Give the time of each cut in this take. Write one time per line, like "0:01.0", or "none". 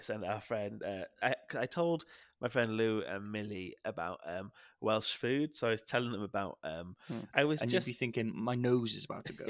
0:01.2
0:07.3